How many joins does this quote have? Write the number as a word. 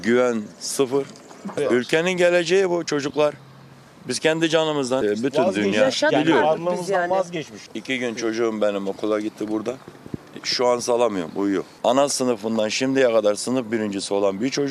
one